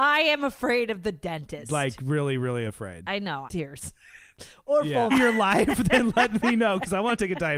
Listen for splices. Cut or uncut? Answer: cut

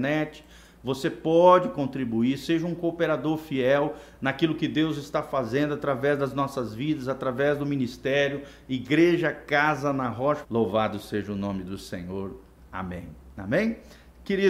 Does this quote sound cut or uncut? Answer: cut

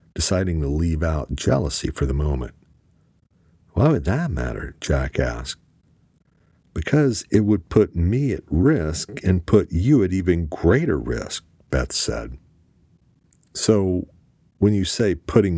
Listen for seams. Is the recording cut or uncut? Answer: uncut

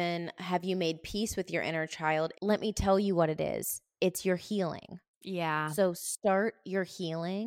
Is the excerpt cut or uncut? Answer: cut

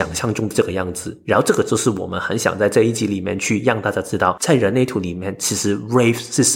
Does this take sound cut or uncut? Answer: uncut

